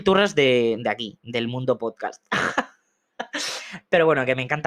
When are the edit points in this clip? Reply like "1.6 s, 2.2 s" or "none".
none

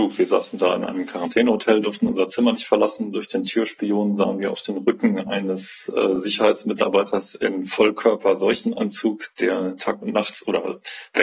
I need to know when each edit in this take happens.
none

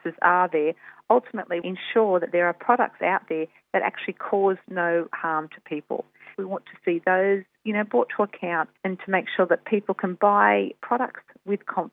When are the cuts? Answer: 1.6 s, 6.3 s, 8.8 s

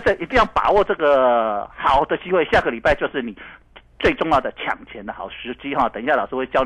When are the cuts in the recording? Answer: none

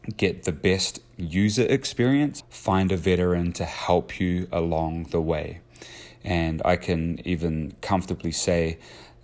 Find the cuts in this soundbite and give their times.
2.4 s

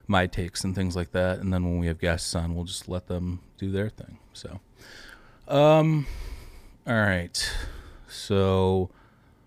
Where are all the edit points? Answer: none

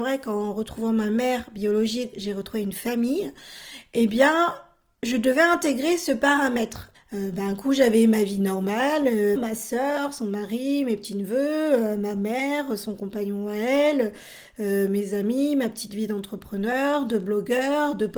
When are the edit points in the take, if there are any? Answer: 6.9 s, 9.4 s

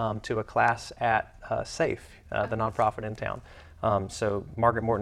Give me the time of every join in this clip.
none

